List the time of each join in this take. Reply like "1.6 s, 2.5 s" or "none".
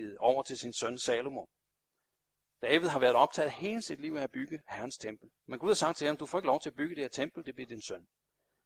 5.4 s, 7.4 s